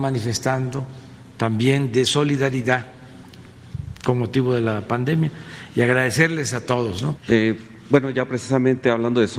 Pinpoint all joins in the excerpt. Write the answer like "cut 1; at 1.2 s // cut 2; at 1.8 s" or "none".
cut 1; at 7.2 s